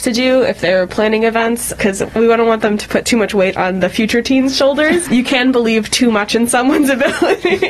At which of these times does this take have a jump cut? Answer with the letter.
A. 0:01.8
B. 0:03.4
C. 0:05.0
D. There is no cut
C